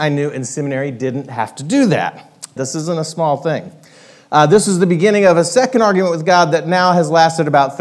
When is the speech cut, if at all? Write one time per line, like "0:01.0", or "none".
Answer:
0:02.6